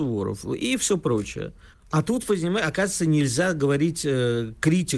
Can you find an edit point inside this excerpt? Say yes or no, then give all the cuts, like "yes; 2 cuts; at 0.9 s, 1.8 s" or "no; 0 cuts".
yes; 1 cut; at 1.7 s